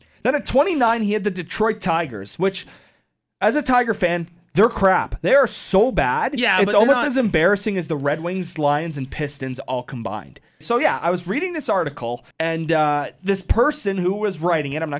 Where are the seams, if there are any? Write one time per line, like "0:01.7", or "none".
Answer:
0:10.6
0:12.3